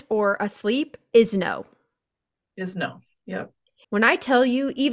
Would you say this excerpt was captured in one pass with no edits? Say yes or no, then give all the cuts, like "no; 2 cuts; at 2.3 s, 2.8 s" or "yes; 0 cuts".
no; 1 cut; at 3.8 s